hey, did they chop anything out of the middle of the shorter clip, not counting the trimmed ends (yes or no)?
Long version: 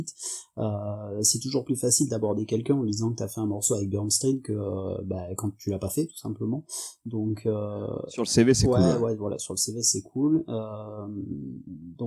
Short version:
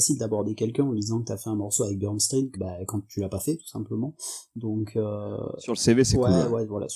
yes